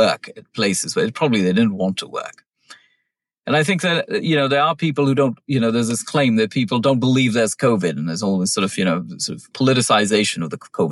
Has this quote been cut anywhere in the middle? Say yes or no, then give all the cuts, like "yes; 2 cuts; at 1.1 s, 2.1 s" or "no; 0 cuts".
no; 0 cuts